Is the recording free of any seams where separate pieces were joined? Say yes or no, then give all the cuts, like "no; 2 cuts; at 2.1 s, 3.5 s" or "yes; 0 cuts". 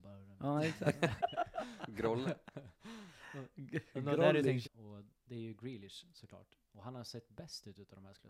no; 2 cuts; at 1.2 s, 4.6 s